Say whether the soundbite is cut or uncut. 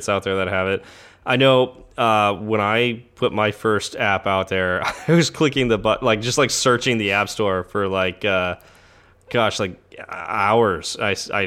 uncut